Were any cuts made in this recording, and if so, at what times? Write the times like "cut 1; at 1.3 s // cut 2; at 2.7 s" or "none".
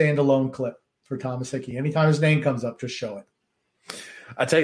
none